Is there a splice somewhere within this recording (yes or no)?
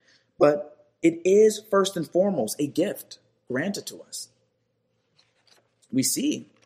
no